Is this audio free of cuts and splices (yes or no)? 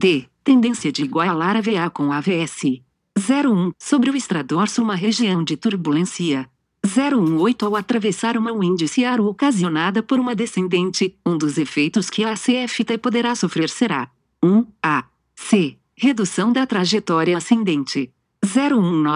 no